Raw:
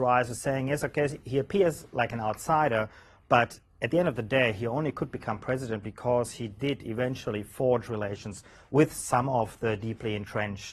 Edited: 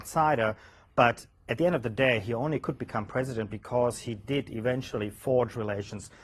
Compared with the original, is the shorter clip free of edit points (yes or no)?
yes